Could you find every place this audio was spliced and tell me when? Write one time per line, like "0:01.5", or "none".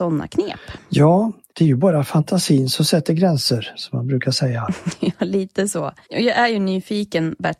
none